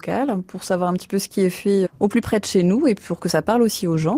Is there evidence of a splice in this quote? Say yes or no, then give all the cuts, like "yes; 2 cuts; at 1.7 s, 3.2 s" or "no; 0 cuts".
yes; 1 cut; at 1.8 s